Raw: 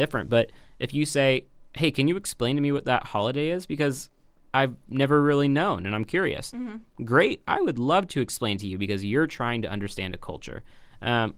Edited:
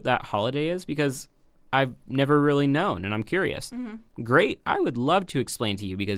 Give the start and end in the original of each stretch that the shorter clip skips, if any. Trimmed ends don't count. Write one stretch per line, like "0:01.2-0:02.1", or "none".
none